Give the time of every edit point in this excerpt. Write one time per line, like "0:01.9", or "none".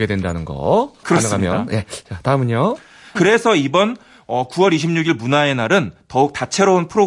0:01.0
0:03.2